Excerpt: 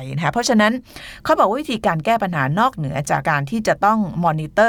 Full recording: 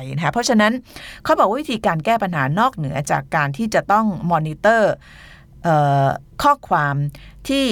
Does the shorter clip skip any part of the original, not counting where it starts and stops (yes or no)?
yes